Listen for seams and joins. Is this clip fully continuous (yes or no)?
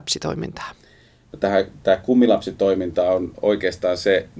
yes